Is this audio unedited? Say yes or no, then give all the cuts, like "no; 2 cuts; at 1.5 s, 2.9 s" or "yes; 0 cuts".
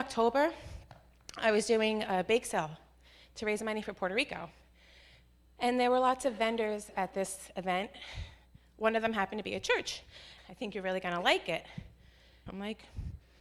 no; 2 cuts; at 10.4 s, 12.5 s